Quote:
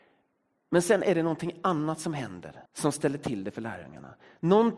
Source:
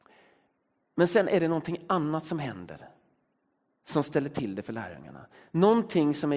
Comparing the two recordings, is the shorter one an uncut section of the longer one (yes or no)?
no